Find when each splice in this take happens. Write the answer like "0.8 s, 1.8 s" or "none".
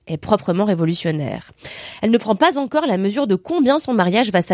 none

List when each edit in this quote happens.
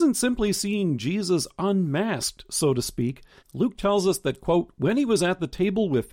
3.4 s

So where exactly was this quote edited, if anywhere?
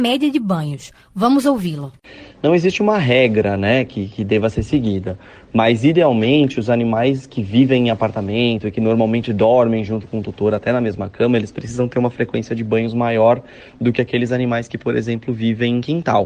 none

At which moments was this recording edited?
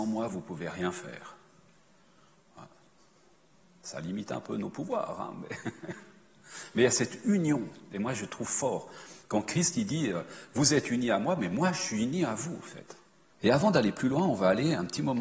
13.3 s

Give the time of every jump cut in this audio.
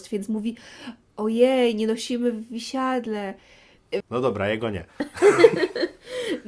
4.0 s

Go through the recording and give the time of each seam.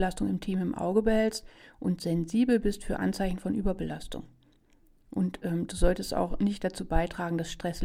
none

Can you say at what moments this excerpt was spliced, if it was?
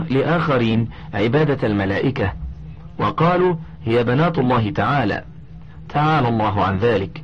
none

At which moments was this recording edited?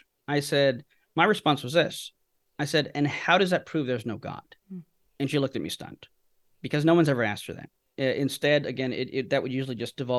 4.6 s

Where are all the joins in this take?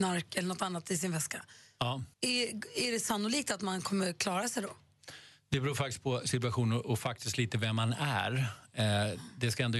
2.1 s

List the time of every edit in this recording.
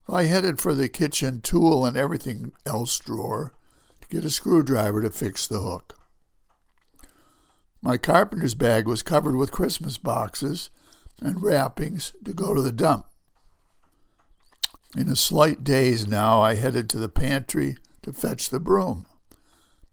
7.6 s, 14.8 s

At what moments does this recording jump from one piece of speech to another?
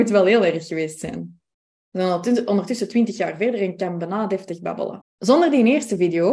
5.0 s

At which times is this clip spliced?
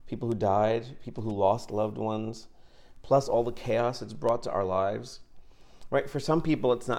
none

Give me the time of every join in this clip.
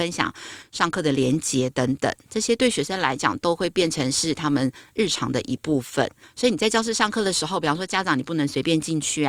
6.2 s

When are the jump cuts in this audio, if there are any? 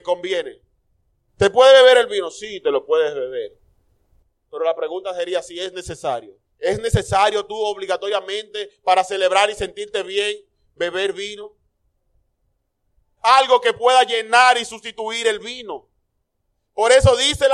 6.5 s, 13.2 s

